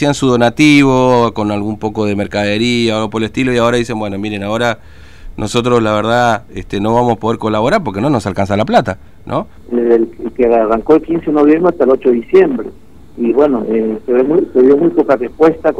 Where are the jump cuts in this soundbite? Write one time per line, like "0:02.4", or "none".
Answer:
0:09.6